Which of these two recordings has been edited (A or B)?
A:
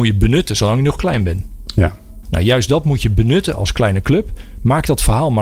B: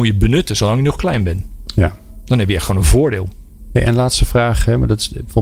A